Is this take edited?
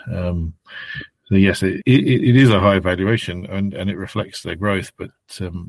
yes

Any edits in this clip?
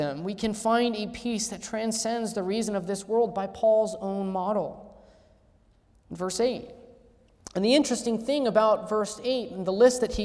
yes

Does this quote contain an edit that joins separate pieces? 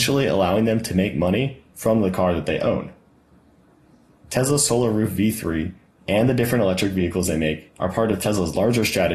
no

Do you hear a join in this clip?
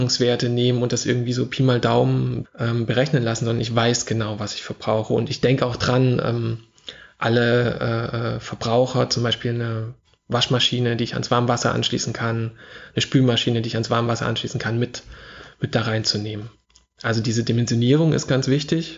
yes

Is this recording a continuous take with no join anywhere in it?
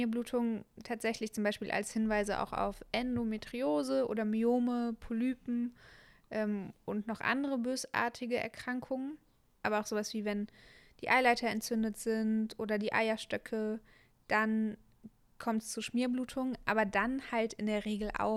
yes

